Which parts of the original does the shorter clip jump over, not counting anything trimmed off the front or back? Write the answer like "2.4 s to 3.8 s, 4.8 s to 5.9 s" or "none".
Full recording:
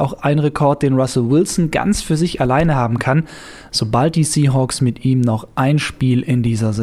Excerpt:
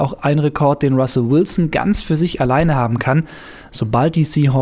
none

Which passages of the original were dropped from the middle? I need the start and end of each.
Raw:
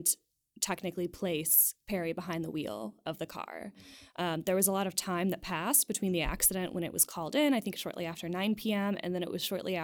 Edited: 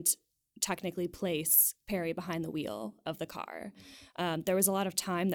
none

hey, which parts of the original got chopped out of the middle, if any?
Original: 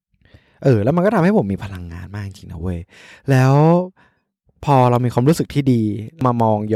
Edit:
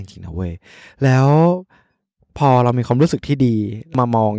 none

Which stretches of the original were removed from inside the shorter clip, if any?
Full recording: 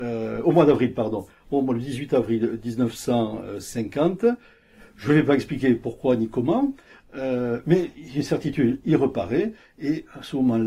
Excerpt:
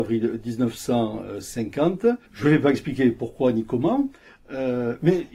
4.4 s to 4.9 s

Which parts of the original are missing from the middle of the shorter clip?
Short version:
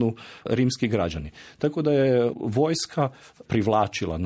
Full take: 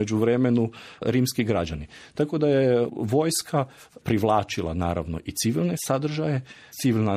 none

